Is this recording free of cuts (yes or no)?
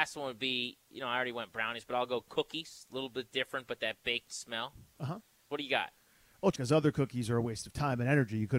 no